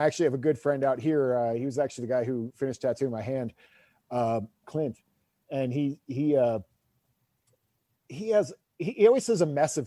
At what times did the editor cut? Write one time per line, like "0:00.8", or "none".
0:04.6